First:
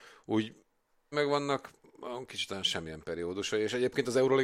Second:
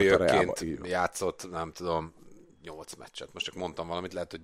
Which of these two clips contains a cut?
first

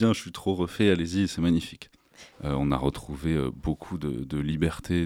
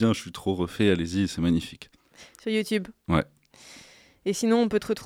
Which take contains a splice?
first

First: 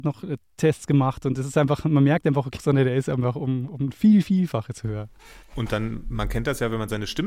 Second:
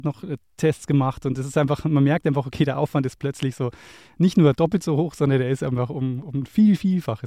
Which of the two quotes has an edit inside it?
first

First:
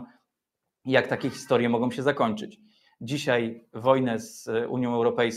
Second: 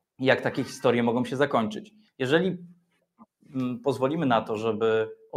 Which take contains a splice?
second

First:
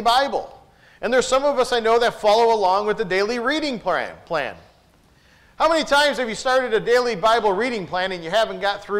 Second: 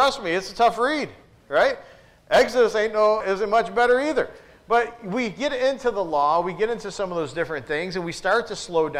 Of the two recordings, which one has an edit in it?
second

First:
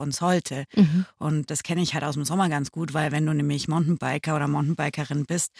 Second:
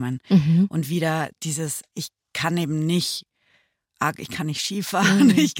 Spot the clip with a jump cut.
first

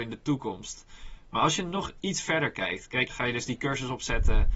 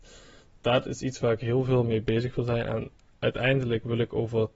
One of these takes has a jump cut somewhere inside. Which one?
first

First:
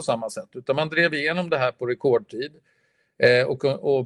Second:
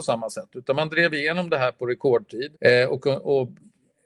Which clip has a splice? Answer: second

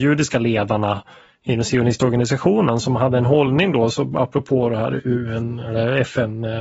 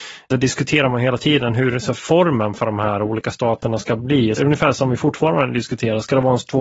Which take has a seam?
second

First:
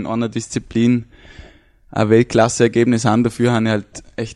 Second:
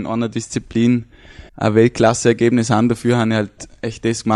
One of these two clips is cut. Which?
second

